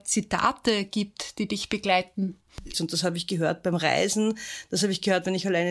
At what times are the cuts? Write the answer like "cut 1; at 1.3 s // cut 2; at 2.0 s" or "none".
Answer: cut 1; at 2.7 s